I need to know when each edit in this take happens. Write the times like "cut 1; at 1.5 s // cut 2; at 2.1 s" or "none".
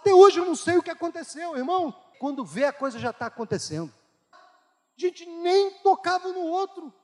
cut 1; at 2.1 s // cut 2; at 4.3 s